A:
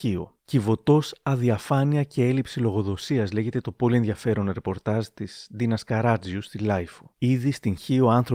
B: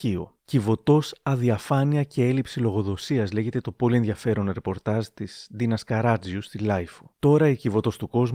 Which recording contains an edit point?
A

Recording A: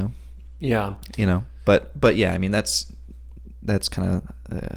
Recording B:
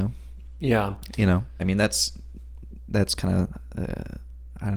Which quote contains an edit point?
B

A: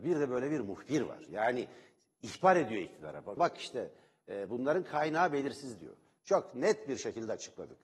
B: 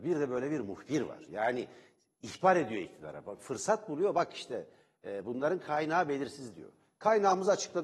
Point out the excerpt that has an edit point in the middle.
A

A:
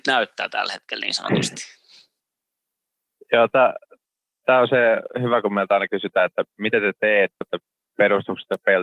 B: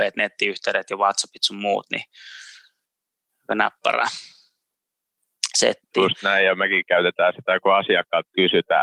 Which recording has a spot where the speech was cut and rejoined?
A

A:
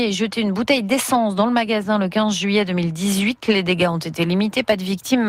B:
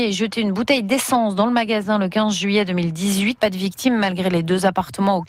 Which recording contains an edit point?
B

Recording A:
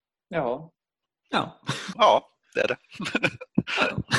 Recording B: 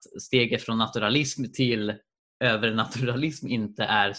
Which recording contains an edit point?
A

